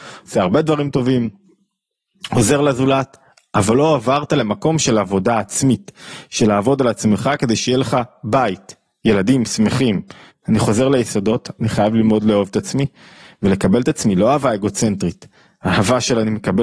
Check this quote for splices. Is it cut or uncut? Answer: cut